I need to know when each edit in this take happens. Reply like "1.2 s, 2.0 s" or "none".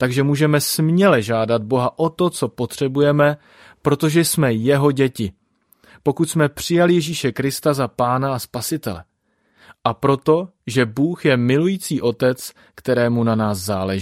none